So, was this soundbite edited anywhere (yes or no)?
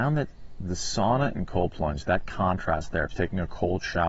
yes